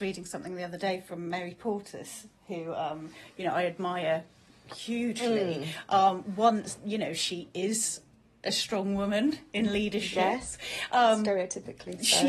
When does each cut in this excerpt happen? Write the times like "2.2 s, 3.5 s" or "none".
none